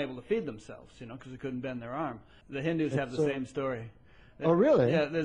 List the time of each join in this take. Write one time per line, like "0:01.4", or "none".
0:02.4